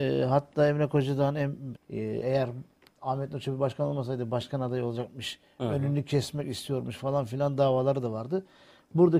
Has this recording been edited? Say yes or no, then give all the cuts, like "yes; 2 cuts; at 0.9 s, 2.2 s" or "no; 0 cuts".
yes; 1 cut; at 1.8 s